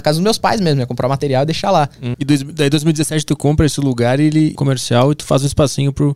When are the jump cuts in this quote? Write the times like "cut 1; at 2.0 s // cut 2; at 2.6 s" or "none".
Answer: cut 1; at 2.1 s // cut 2; at 4.6 s